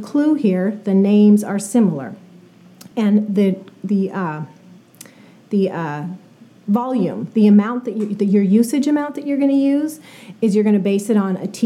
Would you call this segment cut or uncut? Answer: uncut